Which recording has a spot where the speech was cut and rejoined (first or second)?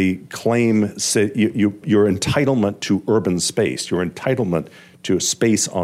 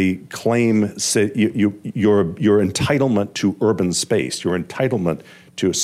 first